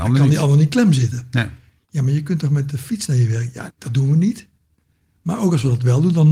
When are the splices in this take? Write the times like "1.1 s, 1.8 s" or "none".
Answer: 3.7 s